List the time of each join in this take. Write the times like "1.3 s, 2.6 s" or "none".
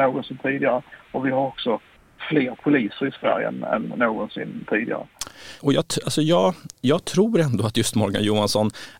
5.6 s